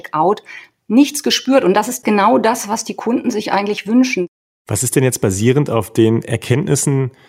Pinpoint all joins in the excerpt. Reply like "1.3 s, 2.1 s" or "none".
none